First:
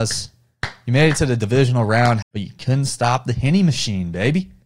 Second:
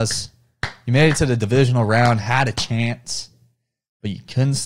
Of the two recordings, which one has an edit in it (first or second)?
first